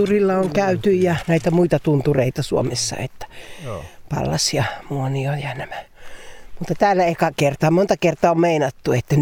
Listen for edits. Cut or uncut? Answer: uncut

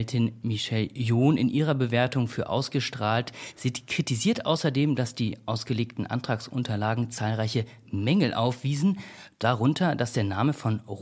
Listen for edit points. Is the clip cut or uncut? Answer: uncut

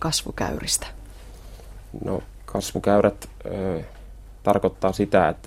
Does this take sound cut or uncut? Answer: uncut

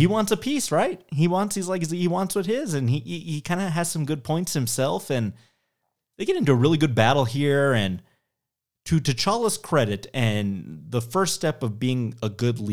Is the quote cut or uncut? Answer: uncut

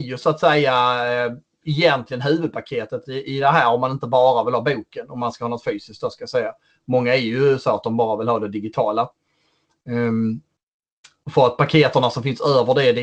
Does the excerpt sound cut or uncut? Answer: uncut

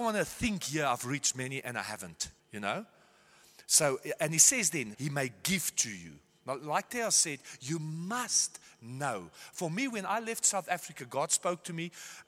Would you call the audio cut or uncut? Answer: cut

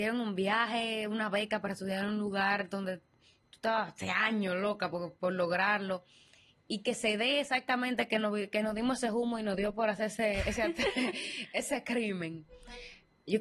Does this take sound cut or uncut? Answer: uncut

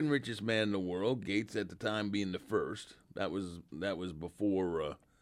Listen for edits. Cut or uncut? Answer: uncut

